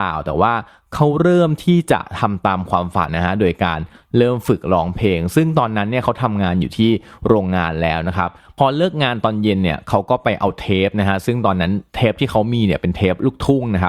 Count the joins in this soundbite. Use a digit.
1